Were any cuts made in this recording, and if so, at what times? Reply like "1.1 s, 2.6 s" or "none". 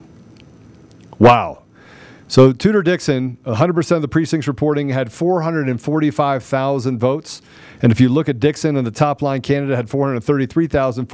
none